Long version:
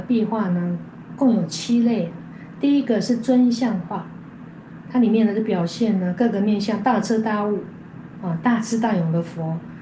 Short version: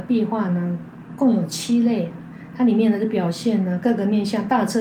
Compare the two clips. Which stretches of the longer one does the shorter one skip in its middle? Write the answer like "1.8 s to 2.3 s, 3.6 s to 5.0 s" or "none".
2.5 s to 4.9 s